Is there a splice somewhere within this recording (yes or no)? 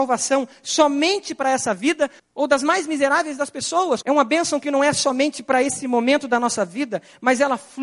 yes